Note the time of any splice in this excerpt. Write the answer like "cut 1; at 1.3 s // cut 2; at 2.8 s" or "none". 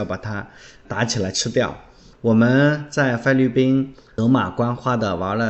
cut 1; at 2.1 s

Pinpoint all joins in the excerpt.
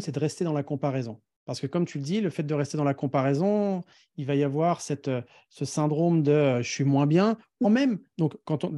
cut 1; at 7.6 s

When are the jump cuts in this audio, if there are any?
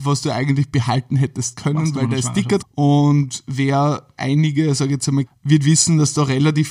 cut 1; at 2.6 s // cut 2; at 5.3 s

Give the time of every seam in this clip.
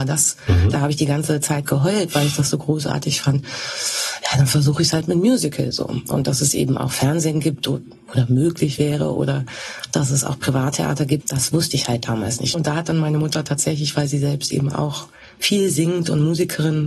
cut 1; at 11.2 s // cut 2; at 12.5 s

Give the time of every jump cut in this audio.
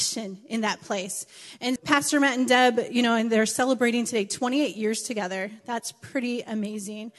cut 1; at 1.8 s

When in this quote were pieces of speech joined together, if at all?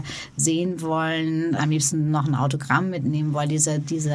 cut 1; at 1.6 s

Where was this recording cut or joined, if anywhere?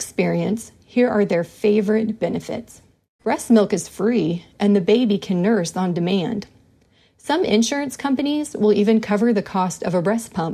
cut 1; at 3.2 s

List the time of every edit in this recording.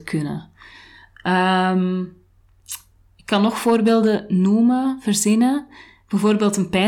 none

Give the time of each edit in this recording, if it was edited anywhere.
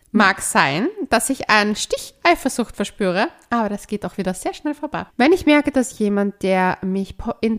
cut 1; at 5.1 s

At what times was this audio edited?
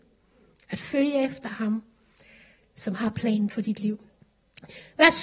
none

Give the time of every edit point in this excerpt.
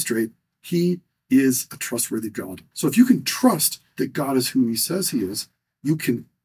cut 1; at 2.7 s

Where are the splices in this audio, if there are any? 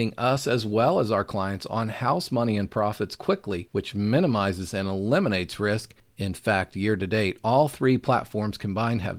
none

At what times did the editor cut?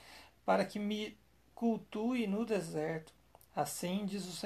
cut 1; at 3.4 s

